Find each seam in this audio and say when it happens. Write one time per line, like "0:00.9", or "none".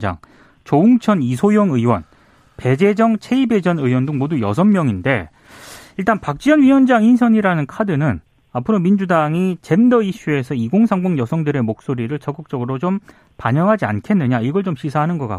none